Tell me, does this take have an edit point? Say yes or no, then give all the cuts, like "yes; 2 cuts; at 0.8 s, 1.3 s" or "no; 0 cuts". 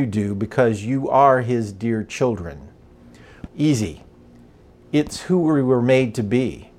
yes; 1 cut; at 3.5 s